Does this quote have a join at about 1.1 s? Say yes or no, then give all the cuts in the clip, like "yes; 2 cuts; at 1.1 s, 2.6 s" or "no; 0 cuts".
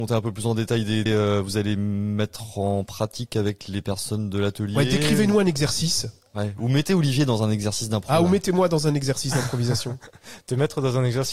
yes; 1 cut; at 1.1 s